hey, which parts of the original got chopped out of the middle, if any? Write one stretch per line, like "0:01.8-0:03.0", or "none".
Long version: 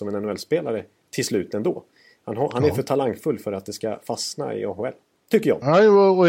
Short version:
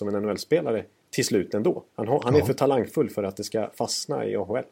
0:01.9-0:02.2